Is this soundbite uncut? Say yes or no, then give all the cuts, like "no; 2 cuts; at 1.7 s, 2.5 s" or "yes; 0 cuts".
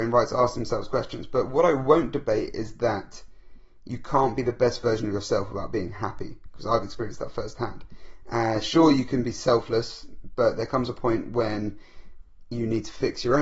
yes; 0 cuts